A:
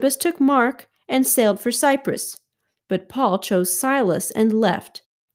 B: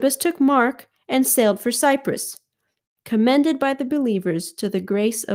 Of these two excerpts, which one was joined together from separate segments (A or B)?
B